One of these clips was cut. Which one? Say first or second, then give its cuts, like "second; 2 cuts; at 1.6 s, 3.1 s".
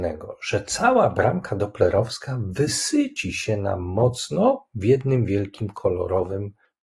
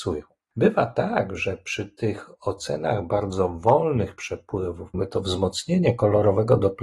second; 1 cut; at 4.9 s